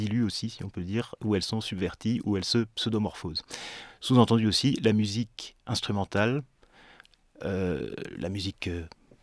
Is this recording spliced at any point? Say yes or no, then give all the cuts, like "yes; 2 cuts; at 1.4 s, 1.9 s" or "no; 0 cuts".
no; 0 cuts